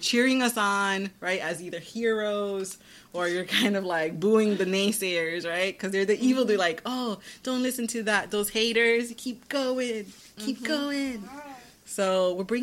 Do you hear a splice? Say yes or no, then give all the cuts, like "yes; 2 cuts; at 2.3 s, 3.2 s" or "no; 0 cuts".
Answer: no; 0 cuts